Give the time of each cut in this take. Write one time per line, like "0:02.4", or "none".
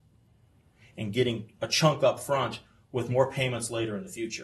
none